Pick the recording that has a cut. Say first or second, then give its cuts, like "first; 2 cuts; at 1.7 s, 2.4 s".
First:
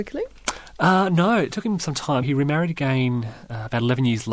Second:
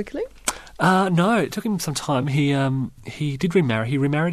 first; 1 cut; at 2.2 s